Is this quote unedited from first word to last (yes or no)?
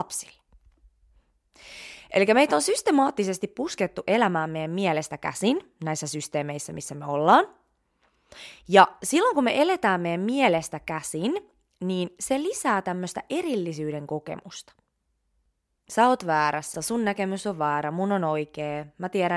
no